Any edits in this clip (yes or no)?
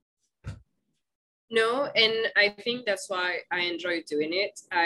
no